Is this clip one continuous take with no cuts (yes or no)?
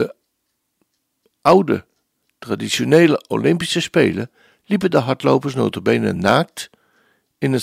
yes